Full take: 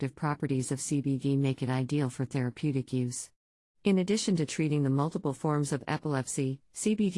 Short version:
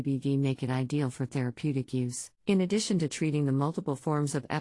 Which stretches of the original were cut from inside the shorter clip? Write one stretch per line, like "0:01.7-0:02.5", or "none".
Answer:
0:03.3-0:03.7